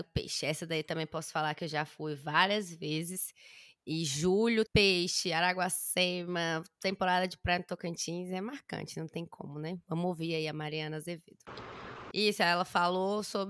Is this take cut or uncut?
cut